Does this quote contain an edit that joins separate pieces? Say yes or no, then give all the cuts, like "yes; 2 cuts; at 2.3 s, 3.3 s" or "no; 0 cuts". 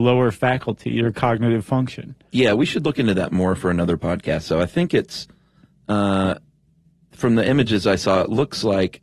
no; 0 cuts